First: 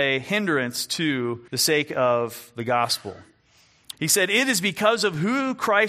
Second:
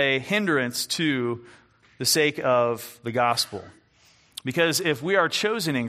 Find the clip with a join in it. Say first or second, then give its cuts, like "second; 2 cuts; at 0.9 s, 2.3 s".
first; 2 cuts; at 1.5 s, 3.9 s